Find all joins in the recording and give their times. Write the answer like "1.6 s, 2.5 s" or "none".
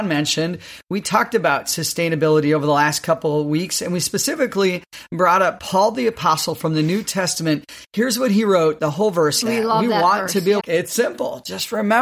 9.4 s, 10.6 s

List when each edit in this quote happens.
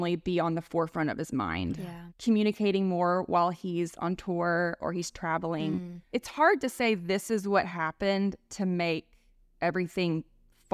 none

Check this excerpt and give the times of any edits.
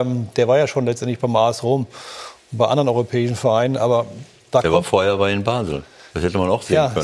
none

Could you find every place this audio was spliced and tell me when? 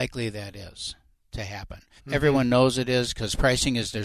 2.0 s

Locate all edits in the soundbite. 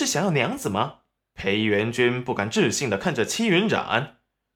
1.2 s

